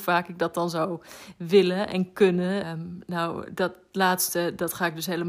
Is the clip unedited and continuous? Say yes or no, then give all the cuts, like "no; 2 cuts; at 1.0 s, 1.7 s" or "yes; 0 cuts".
no; 1 cut; at 2.6 s